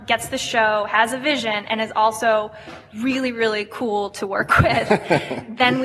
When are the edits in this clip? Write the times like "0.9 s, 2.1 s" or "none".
none